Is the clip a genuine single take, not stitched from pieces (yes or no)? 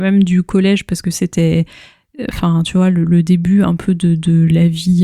yes